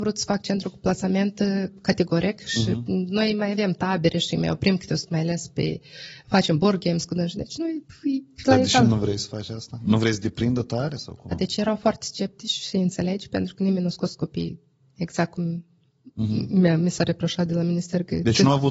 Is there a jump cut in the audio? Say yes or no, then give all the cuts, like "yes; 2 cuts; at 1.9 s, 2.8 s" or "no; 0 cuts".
yes; 1 cut; at 11.3 s